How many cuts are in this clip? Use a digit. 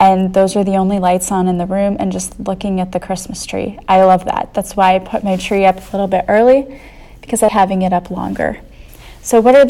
1